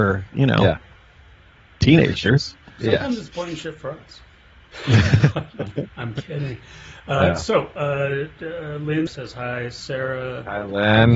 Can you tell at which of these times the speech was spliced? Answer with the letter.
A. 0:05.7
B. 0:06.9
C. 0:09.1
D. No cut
C